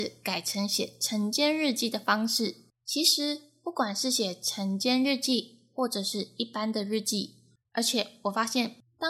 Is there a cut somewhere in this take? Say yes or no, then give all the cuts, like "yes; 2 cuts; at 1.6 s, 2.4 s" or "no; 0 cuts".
yes; 2 cuts; at 2.7 s, 7.6 s